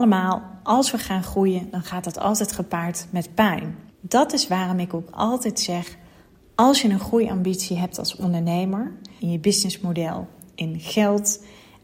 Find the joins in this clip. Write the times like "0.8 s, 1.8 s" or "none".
3.9 s, 9.2 s